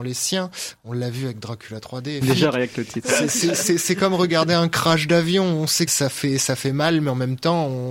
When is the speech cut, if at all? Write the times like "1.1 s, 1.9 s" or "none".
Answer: 2.2 s, 5.9 s